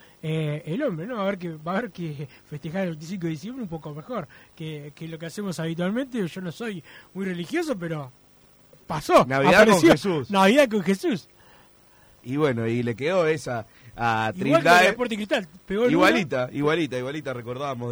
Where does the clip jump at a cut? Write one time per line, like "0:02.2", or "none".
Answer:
none